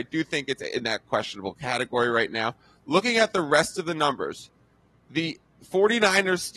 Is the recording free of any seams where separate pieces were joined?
yes; 0 cuts

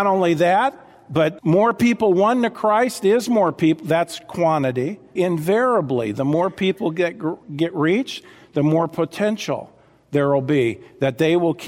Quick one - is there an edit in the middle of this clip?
yes; 1 cut; at 5.2 s

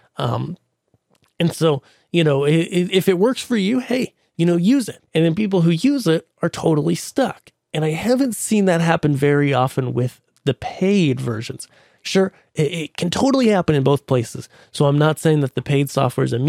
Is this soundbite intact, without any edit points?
no; 1 cut; at 5.1 s

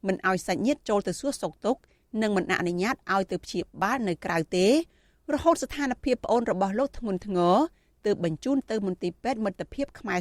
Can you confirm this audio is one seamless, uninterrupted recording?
yes; 0 cuts

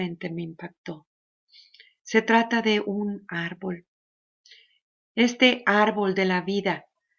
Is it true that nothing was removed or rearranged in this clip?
yes; 0 cuts

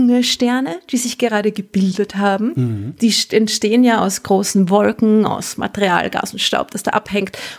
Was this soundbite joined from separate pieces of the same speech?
no; 0 cuts

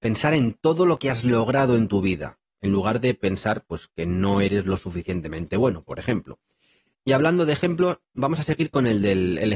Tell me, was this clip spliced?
no; 0 cuts

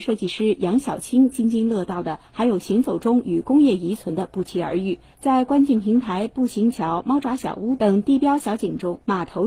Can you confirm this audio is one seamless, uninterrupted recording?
yes; 0 cuts

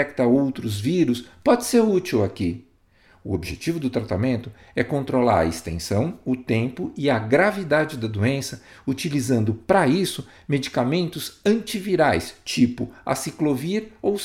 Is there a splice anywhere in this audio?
no; 0 cuts

